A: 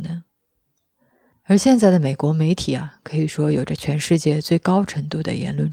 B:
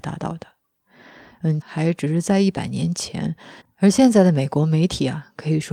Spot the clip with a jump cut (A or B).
B